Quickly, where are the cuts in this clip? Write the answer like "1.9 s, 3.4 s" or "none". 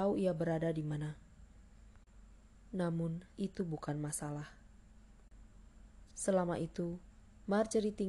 3.3 s, 6.1 s